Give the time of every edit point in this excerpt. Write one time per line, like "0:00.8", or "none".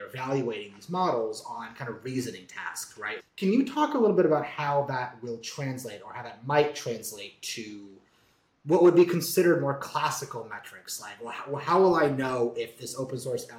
0:03.2